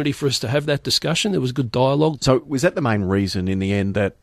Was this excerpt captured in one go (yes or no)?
no